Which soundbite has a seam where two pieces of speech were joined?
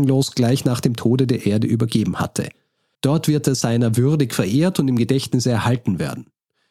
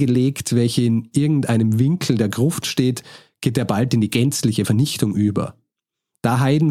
first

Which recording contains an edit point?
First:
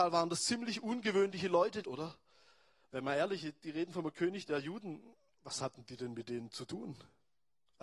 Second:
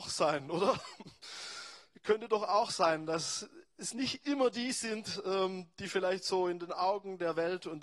first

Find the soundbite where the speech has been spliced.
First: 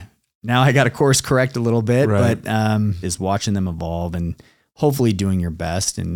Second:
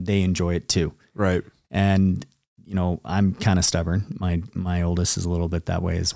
first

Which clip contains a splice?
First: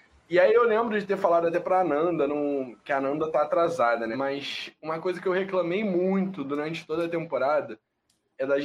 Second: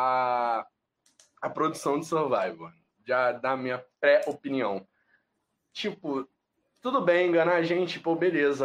first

